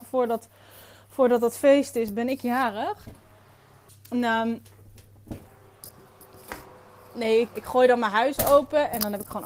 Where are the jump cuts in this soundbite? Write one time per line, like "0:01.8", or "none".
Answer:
0:03.9
0:07.5